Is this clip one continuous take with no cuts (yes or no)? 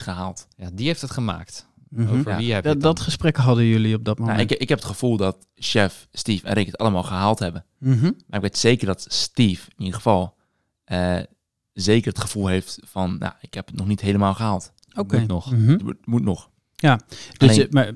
yes